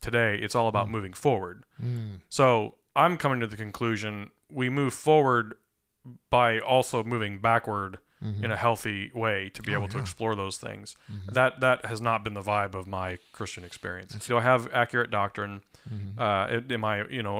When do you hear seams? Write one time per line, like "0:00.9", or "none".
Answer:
0:14.3